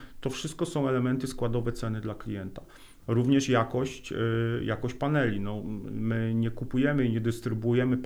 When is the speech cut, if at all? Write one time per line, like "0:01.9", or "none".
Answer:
none